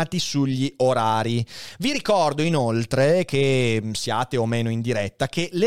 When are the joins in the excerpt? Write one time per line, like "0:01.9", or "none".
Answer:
none

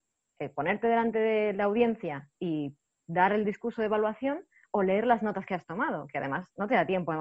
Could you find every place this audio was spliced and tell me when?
0:03.4

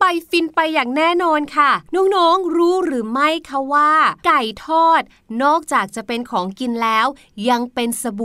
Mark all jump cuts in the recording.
0:01.9

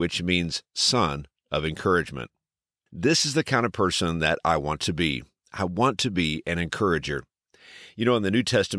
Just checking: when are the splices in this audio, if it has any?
0:02.9

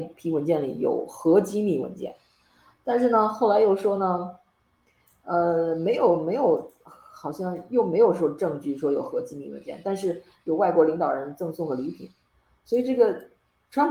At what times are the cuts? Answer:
none

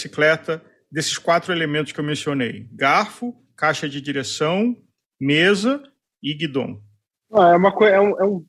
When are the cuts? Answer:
none

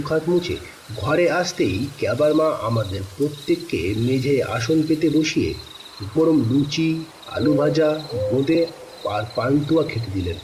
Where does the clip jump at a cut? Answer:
0:06.1

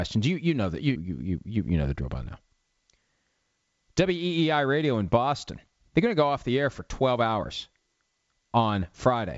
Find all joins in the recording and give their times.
0:01.0

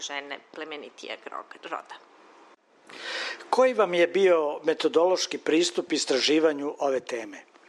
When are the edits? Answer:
none

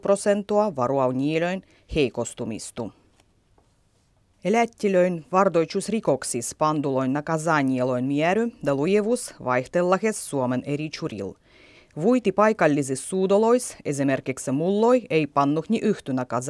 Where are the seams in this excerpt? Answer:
none

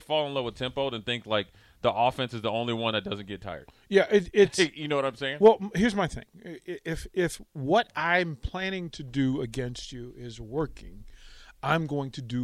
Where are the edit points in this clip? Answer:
none

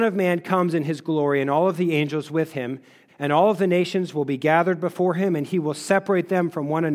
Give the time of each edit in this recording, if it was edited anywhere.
0:03.1

